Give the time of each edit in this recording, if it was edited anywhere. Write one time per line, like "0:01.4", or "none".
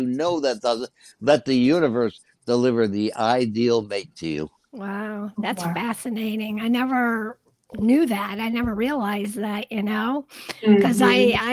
none